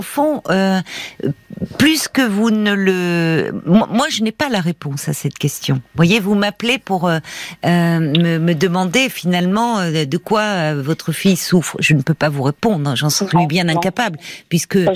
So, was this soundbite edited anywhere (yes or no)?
no